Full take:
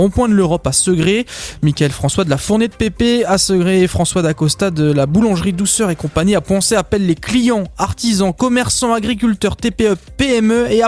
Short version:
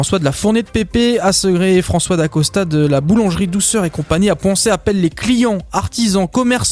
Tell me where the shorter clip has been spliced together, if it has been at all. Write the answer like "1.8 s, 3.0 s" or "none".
none